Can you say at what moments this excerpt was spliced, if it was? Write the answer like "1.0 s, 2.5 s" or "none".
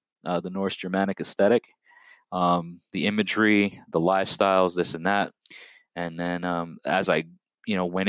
none